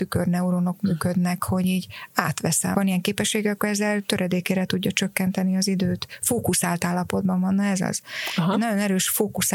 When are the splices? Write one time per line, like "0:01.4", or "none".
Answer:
0:02.7